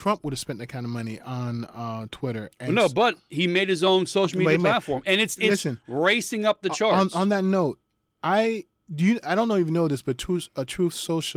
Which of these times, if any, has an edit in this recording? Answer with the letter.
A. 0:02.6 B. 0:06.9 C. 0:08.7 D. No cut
D